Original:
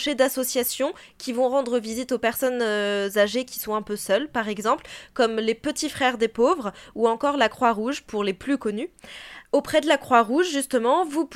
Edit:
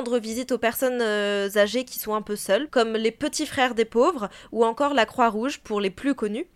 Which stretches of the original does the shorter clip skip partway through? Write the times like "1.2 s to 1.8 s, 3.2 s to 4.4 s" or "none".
4.3 s to 5.1 s